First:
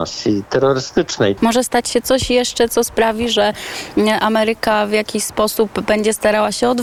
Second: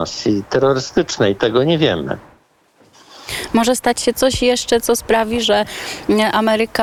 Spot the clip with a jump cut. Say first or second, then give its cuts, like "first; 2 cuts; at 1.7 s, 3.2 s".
first; 1 cut; at 1.4 s